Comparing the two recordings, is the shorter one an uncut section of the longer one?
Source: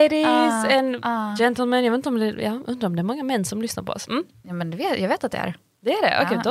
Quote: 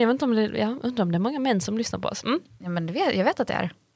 yes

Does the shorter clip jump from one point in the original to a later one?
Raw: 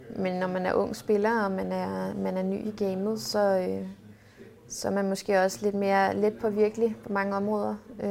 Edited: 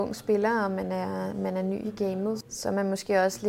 yes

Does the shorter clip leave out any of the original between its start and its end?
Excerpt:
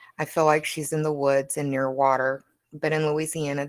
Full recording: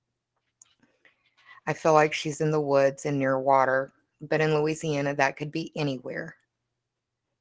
no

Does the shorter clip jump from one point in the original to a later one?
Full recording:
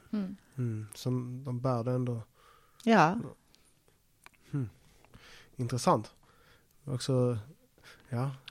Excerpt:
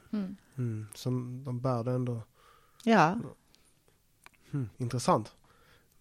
yes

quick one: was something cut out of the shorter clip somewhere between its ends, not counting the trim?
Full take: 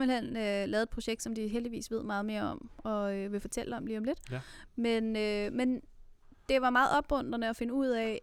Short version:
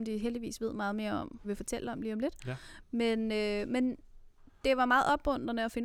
yes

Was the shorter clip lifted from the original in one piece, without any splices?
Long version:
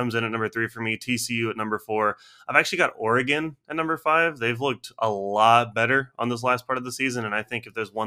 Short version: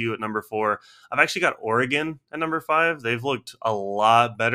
yes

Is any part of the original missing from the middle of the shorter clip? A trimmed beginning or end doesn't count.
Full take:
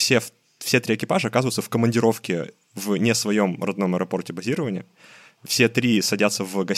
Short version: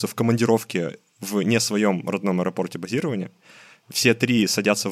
no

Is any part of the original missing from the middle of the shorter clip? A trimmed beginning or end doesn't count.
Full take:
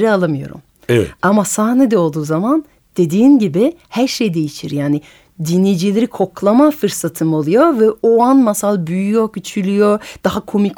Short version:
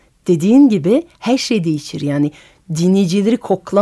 no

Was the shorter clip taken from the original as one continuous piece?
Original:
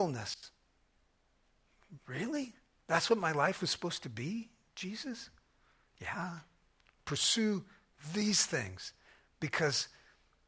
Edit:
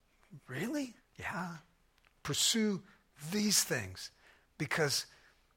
no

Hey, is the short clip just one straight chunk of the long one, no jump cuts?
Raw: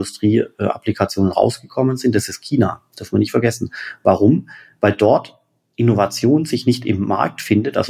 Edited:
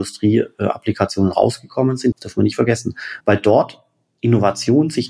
no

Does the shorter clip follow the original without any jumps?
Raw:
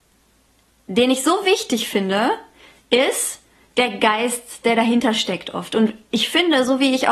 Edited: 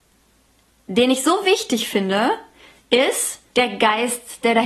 no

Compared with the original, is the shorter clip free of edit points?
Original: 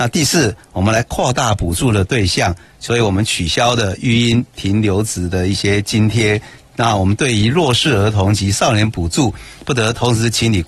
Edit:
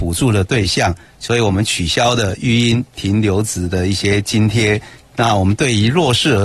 yes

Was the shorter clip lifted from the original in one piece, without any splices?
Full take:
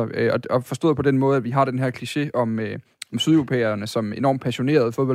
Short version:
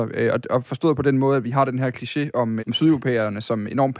no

